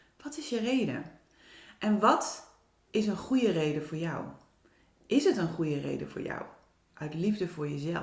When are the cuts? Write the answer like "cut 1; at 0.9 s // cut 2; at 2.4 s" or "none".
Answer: none